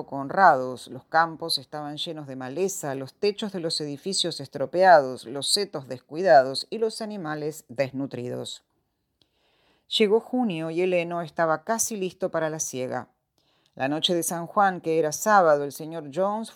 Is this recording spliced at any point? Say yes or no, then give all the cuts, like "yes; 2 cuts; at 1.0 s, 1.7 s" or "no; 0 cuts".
no; 0 cuts